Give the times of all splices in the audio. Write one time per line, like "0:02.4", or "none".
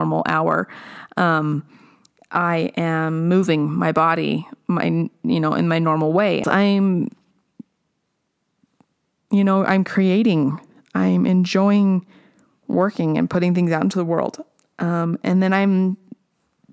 0:06.4